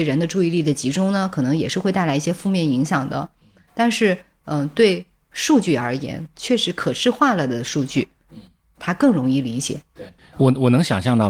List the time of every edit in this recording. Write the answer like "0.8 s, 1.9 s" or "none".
none

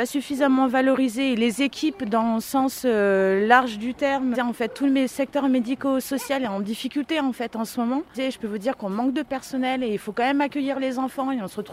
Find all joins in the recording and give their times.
4.3 s, 8.1 s

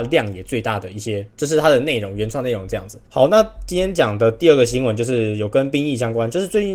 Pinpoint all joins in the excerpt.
3.1 s

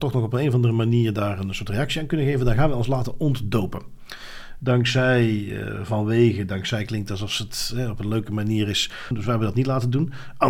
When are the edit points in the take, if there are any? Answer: 4.6 s, 9.1 s

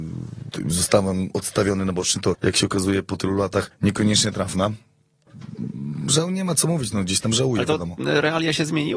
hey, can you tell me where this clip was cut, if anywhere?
2.3 s

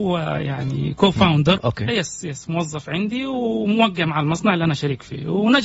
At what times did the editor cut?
1.6 s

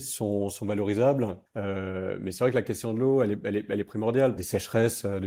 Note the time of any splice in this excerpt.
1.5 s, 4.4 s

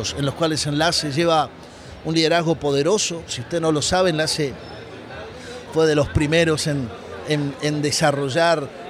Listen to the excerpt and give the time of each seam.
none

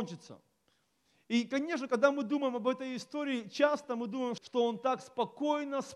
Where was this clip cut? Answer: 4.4 s

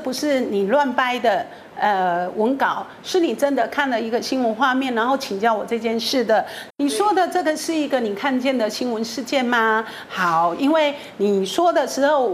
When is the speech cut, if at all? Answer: 6.7 s

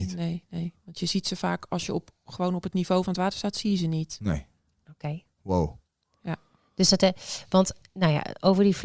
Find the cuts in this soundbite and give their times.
none

